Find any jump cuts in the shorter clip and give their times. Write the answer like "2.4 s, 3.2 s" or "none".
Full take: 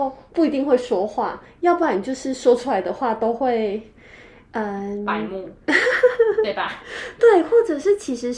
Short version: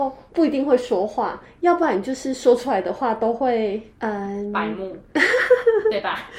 3.9 s